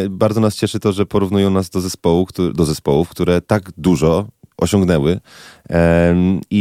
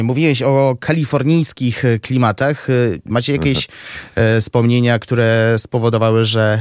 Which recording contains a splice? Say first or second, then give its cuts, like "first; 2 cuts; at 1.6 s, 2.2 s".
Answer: second; 1 cut; at 3.1 s